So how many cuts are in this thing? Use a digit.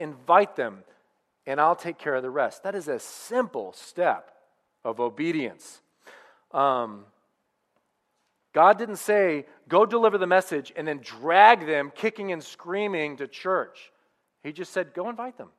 0